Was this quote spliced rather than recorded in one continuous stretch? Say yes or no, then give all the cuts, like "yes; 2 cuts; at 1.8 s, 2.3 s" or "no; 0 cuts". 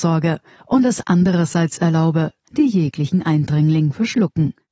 yes; 1 cut; at 2.4 s